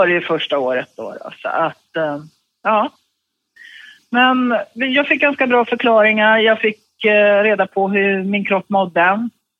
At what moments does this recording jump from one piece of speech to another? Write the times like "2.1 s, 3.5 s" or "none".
none